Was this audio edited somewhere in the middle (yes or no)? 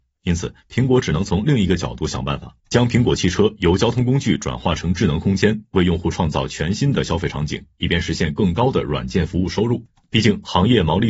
yes